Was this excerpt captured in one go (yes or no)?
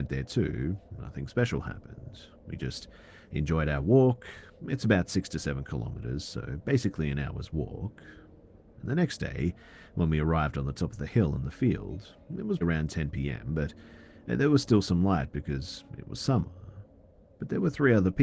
no